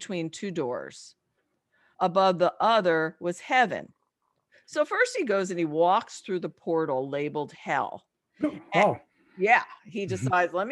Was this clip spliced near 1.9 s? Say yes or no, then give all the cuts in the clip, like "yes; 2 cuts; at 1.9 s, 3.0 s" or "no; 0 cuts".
yes; 1 cut; at 1.9 s